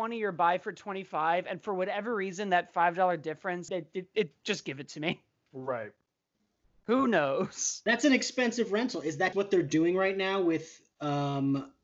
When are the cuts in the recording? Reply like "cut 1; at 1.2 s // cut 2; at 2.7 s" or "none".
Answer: cut 1; at 3.7 s // cut 2; at 9.3 s